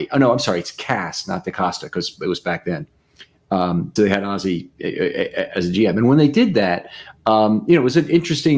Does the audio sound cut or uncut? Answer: cut